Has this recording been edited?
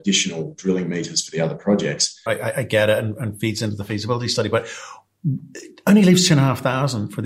yes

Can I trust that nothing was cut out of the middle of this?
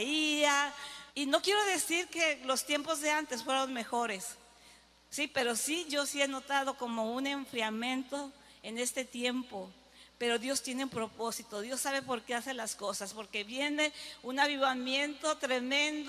no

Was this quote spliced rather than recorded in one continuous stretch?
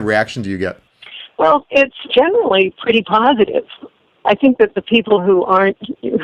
yes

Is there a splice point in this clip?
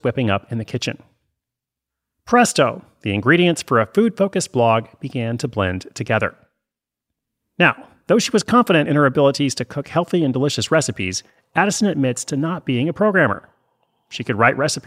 no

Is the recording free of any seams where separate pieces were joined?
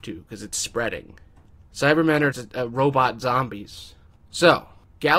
no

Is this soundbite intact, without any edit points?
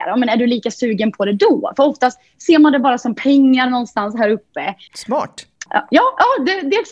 no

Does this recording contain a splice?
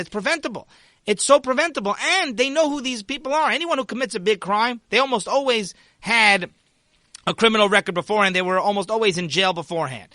no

